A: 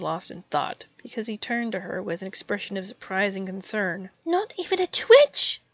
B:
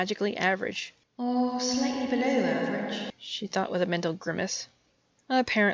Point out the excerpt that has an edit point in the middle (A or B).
A